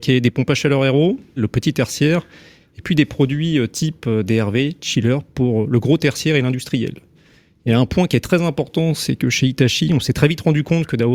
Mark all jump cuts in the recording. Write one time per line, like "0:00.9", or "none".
0:01.4